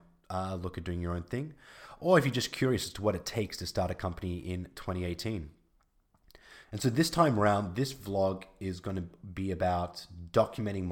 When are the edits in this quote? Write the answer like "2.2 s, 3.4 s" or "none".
6.6 s